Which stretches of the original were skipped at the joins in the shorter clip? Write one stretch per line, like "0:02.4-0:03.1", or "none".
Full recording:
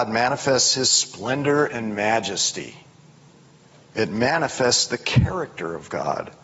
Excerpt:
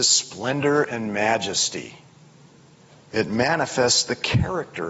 none